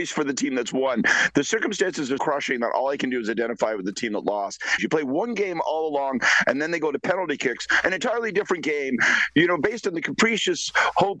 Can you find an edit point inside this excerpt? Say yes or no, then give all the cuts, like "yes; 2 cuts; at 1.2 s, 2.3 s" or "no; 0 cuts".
yes; 2 cuts; at 2.2 s, 4.8 s